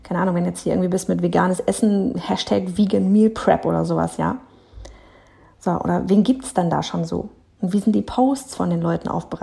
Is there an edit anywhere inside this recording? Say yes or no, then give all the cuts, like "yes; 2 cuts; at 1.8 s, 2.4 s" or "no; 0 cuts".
no; 0 cuts